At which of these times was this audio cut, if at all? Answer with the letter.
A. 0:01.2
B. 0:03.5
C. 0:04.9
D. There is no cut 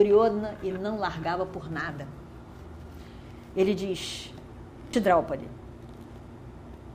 C